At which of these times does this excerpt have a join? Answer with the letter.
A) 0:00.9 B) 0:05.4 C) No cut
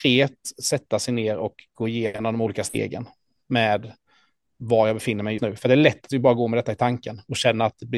B